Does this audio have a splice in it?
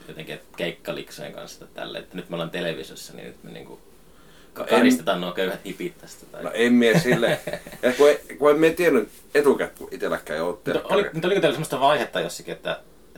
yes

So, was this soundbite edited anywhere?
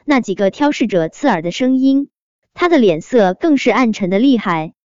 no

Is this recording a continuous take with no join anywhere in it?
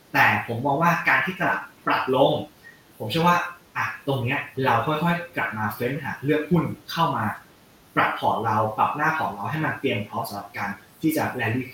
yes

